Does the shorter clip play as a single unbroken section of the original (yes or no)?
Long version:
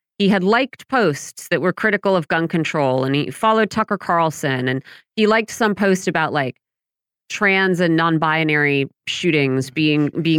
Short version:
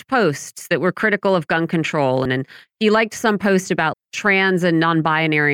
no